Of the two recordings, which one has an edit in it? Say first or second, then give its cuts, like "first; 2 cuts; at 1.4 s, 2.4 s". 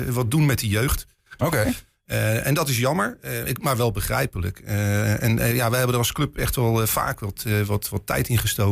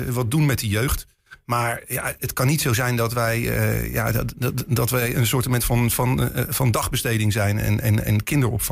first; 1 cut; at 1.4 s